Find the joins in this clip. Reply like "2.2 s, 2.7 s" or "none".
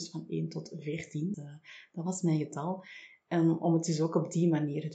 1.3 s

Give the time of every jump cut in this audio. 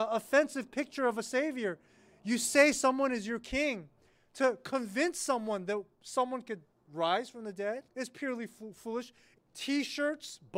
7.9 s, 9.3 s

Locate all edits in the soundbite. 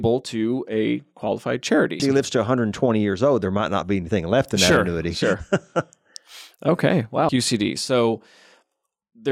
2.0 s, 7.3 s

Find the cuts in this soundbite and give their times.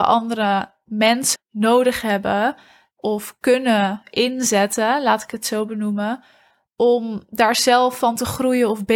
1.4 s

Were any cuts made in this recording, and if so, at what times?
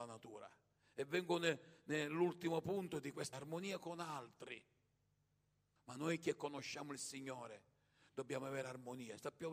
3.3 s, 5.8 s

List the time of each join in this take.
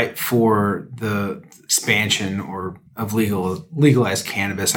2.9 s

